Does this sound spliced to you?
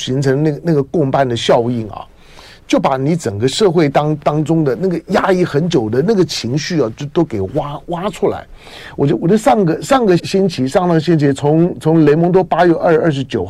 yes; 1 cut; at 10.2 s

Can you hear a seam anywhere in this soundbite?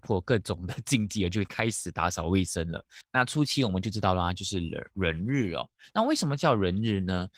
yes; 1 cut; at 3.0 s

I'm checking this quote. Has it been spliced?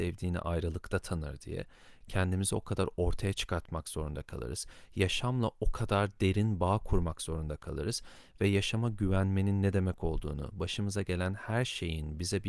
yes; 1 cut; at 2.0 s

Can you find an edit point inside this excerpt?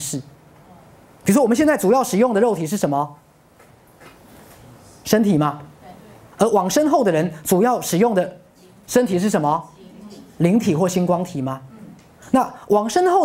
no; 0 cuts

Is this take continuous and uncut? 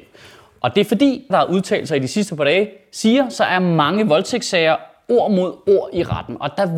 no; 1 cut; at 1.3 s

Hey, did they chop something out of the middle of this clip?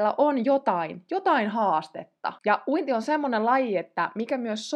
yes; 1 cut; at 2.4 s

